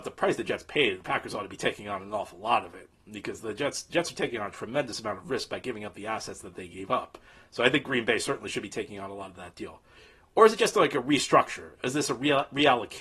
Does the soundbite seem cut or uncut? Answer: uncut